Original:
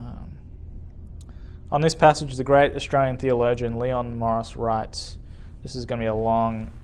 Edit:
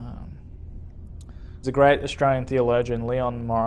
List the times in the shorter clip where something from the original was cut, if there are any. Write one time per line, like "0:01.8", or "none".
0:01.6